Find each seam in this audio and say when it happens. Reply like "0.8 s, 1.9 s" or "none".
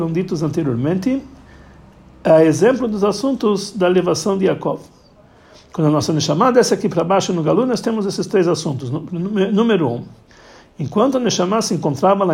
none